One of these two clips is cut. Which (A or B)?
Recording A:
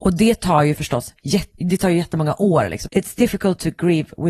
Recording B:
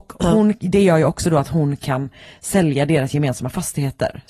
A